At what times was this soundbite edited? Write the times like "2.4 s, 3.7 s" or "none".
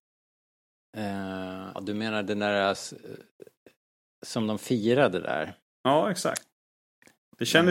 1.8 s